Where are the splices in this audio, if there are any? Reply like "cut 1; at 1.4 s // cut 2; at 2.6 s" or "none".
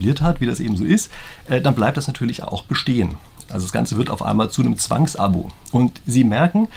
cut 1; at 2.4 s // cut 2; at 3.5 s